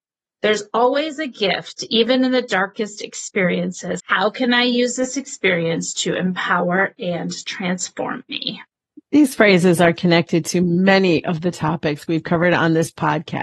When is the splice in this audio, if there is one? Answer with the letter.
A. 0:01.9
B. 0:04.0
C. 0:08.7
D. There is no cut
B